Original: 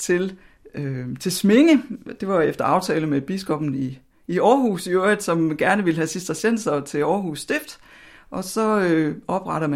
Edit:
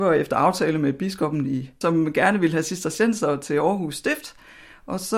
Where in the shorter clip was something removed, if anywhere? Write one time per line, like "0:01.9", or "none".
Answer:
0:01.8